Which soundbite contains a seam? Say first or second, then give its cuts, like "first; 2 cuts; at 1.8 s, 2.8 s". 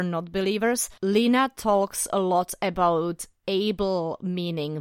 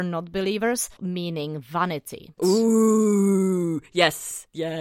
second; 2 cuts; at 1.0 s, 2.4 s